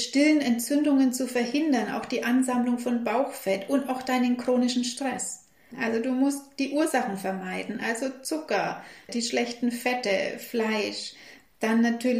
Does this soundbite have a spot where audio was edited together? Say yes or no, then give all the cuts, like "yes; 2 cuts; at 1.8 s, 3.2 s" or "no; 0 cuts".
yes; 2 cuts; at 5.7 s, 9.1 s